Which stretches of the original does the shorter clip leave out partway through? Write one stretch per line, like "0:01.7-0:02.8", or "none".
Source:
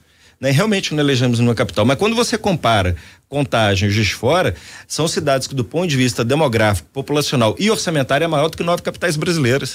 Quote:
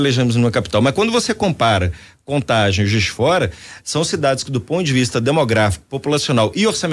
none